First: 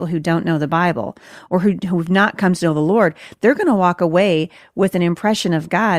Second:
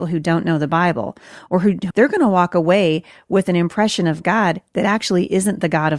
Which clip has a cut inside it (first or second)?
second